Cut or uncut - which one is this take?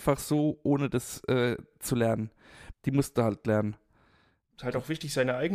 cut